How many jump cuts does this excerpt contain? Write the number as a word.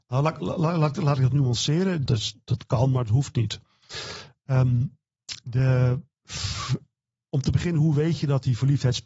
one